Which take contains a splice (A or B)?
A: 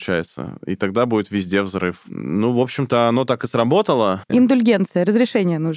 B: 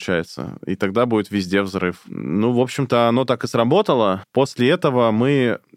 A